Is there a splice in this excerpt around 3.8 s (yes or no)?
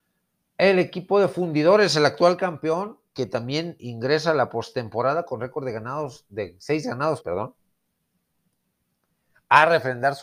yes